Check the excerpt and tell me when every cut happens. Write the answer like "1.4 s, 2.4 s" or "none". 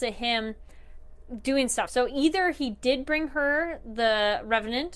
none